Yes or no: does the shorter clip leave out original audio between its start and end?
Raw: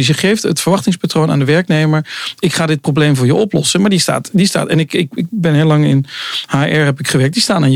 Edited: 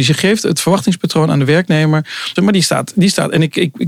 yes